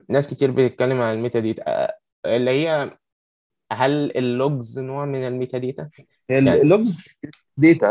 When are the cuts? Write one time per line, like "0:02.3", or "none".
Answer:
0:06.0